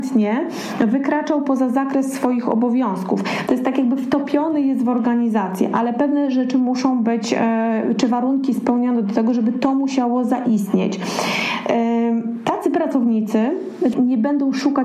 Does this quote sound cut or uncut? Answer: cut